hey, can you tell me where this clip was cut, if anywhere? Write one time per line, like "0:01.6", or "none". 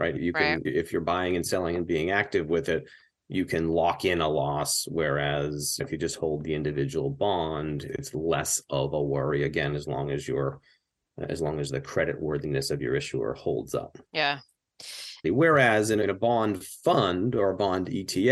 0:14.1
0:15.2